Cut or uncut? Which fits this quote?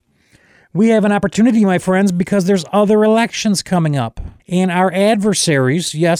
cut